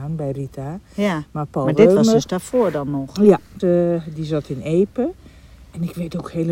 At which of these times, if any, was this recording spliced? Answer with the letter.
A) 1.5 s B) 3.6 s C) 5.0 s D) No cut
B